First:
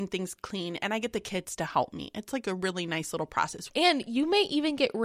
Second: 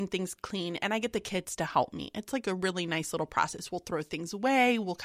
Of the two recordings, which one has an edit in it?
first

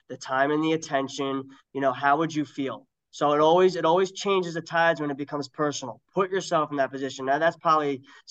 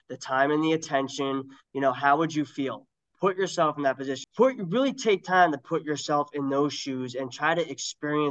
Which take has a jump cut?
second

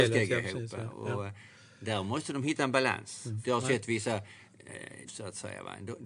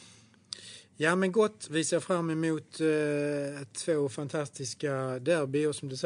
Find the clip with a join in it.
first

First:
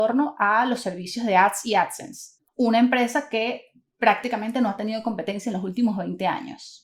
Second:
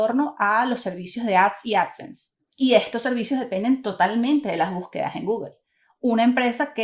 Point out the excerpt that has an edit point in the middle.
first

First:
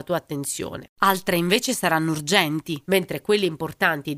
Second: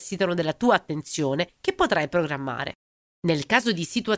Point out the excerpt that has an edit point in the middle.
first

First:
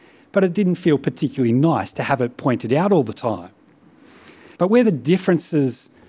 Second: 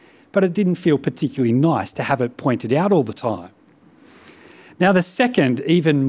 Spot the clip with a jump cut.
first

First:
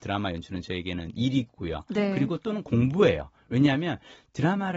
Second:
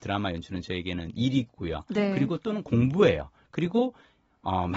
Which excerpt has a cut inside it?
second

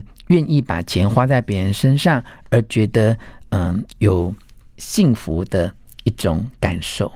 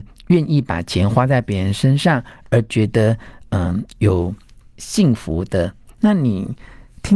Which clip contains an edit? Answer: second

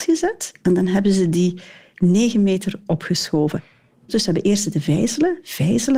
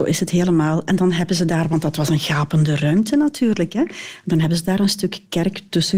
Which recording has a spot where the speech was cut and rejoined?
first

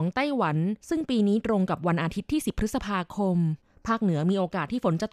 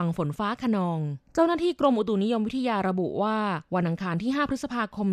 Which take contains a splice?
second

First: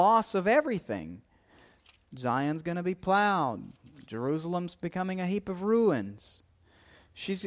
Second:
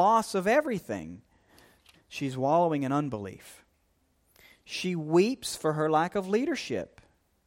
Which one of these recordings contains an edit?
second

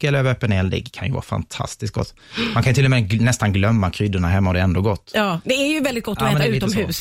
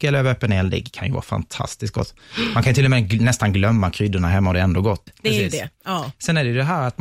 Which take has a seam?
second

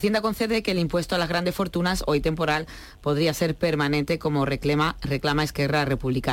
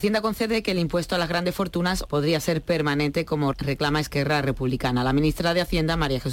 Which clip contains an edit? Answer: second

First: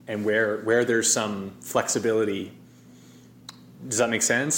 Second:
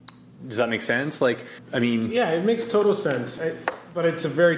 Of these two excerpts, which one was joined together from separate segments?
second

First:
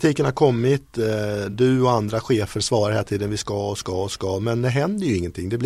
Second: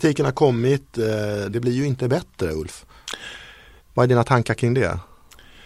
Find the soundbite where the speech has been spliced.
second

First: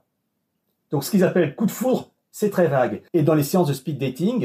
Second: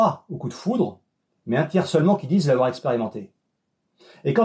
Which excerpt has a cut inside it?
first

